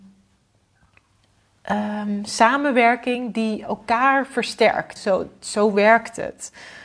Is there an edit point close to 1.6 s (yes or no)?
no